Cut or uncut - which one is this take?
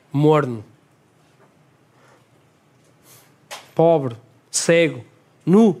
uncut